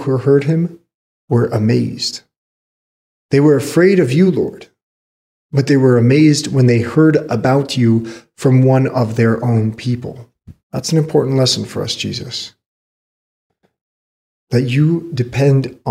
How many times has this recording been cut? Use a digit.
1